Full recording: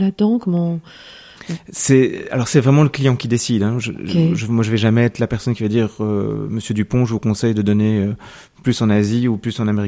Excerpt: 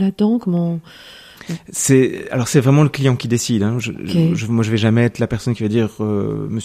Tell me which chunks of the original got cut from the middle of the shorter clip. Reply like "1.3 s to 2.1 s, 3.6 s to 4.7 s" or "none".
none